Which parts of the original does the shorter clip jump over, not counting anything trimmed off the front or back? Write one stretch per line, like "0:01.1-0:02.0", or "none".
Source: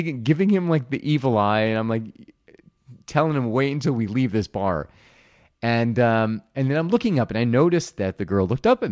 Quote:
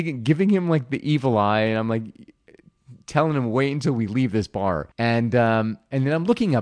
0:04.9-0:05.6